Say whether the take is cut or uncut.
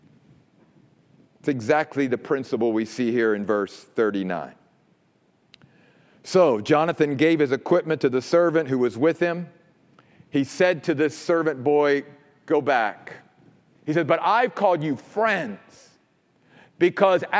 cut